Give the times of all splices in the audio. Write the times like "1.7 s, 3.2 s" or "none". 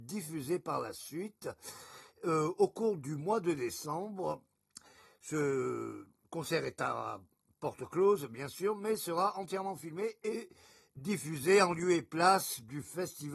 none